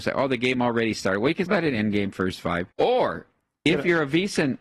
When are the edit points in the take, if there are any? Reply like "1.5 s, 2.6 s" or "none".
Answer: 1.5 s, 2.7 s